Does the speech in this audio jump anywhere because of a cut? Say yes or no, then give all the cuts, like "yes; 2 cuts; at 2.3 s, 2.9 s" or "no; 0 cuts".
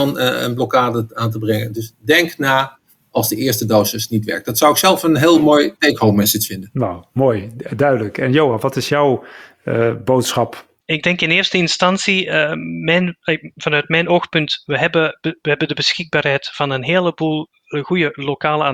no; 0 cuts